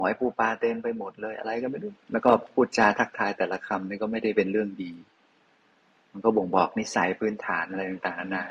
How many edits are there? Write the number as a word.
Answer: one